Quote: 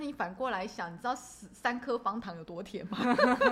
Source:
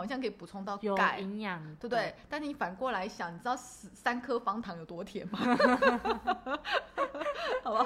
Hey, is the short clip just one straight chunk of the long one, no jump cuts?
yes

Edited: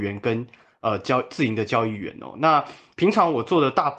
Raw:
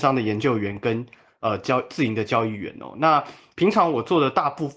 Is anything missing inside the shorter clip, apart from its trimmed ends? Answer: no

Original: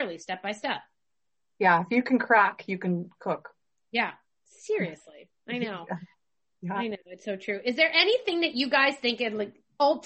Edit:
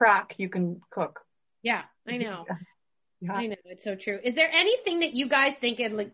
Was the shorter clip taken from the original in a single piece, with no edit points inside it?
no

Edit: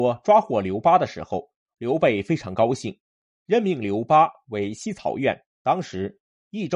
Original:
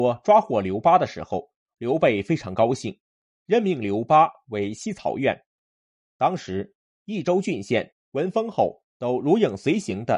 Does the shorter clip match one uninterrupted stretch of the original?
no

